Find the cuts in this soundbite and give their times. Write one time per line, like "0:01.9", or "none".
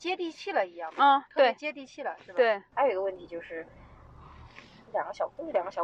0:02.7